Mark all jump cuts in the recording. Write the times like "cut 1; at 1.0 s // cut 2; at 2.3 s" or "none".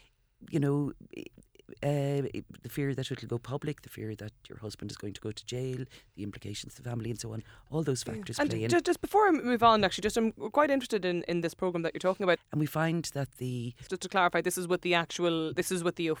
cut 1; at 12.4 s // cut 2; at 13.9 s